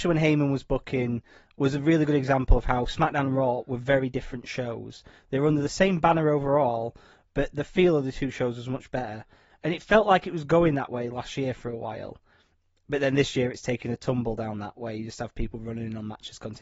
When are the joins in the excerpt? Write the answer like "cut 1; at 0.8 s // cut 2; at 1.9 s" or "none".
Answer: cut 1; at 9.5 s